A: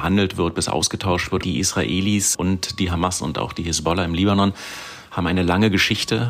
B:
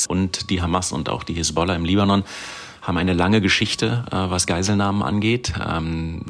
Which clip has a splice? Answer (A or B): A